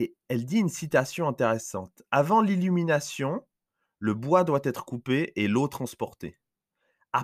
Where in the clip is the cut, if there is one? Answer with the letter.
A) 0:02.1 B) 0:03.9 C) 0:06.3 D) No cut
D